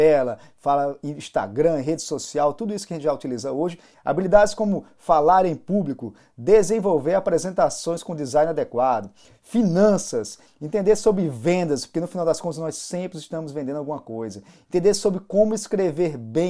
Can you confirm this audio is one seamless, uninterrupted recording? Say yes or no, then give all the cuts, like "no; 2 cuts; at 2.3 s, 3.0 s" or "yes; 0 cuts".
no; 2 cuts; at 3.9 s, 10.5 s